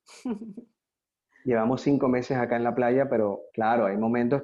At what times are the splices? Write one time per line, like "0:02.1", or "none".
0:03.5